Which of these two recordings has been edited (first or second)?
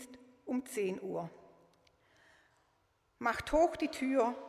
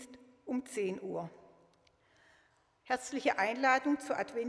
second